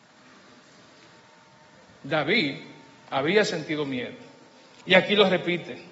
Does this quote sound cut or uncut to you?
uncut